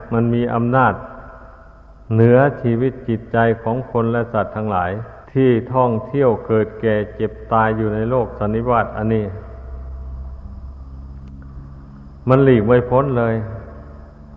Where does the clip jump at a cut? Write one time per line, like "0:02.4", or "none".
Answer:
0:05.2